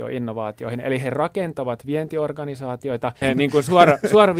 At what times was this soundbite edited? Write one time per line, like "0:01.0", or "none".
0:03.2